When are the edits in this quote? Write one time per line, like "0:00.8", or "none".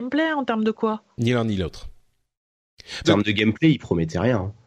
0:03.0